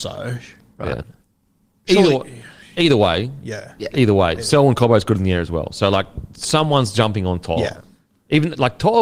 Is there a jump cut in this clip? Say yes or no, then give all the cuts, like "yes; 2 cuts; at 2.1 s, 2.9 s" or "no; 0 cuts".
no; 0 cuts